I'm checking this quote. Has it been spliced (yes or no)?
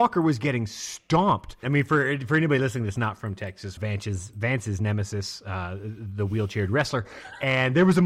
yes